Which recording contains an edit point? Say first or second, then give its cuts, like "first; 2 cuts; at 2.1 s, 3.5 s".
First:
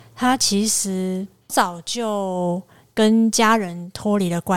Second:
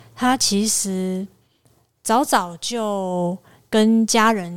first; 1 cut; at 1.5 s